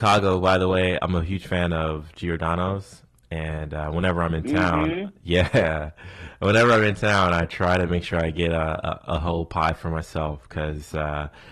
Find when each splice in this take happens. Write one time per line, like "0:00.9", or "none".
0:01.0